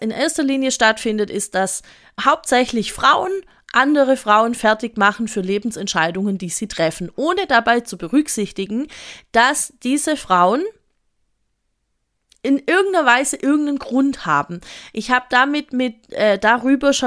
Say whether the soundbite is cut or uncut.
cut